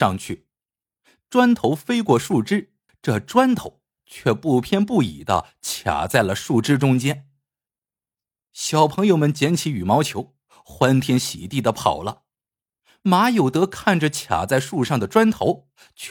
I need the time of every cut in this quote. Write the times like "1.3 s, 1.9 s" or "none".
2.9 s